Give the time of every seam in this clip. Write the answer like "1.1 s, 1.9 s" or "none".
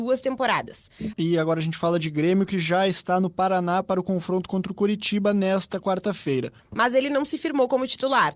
1.1 s, 6.6 s

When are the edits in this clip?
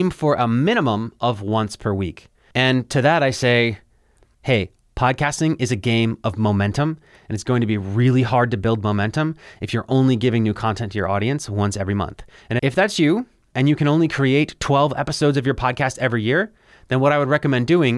2.5 s

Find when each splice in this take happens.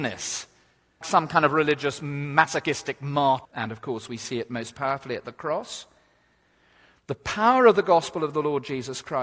1.0 s, 3.4 s

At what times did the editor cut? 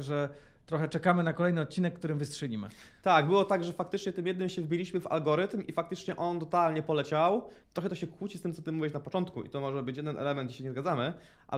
7.6 s

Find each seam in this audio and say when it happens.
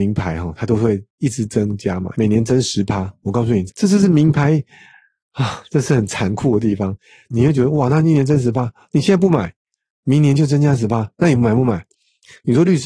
none

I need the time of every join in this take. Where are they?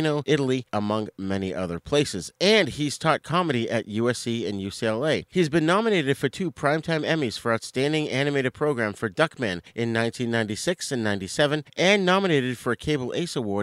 none

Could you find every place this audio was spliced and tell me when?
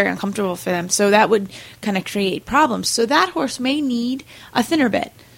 none

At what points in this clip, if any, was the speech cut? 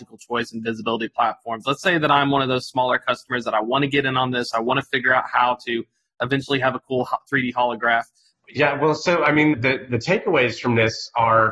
8.3 s, 9.5 s

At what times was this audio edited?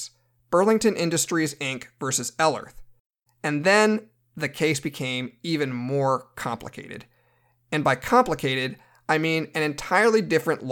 3.3 s

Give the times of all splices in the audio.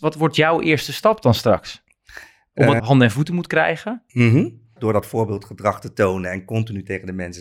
2.8 s, 4.8 s

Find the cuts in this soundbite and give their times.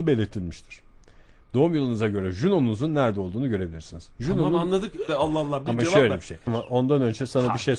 5.1 s, 6.5 s

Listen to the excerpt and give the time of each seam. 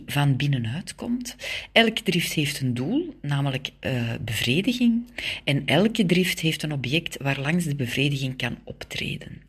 none

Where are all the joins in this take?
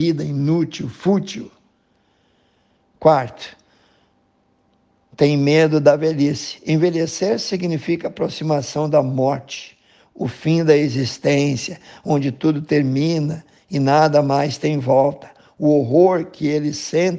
none

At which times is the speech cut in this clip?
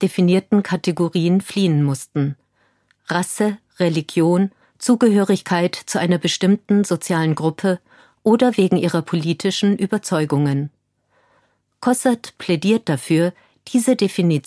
4.6 s

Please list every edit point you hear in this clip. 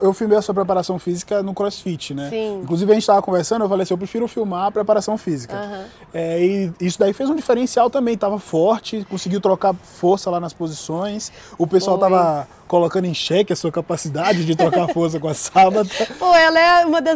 none

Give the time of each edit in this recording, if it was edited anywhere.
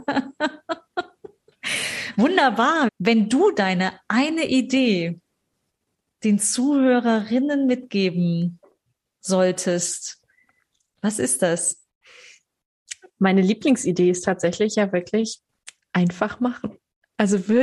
2.9 s

